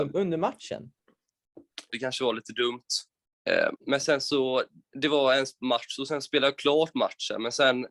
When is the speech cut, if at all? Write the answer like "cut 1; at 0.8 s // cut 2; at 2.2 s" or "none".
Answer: cut 1; at 1.9 s // cut 2; at 3.8 s